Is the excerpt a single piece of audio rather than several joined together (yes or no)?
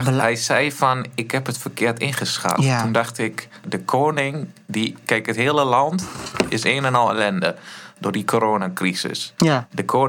no